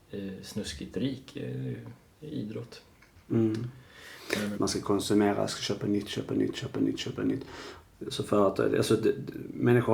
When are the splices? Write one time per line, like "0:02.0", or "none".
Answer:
0:04.5

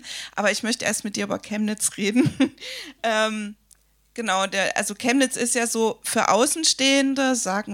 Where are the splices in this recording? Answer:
none

